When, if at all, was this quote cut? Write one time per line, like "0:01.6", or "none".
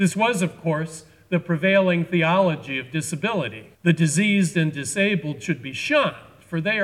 0:03.7